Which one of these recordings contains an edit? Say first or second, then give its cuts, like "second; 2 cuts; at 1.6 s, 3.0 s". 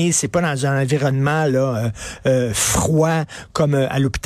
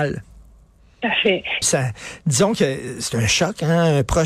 second; 1 cut; at 1.6 s